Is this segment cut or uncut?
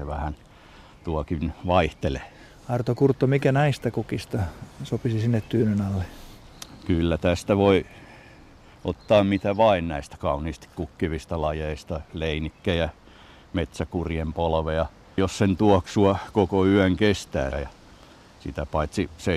cut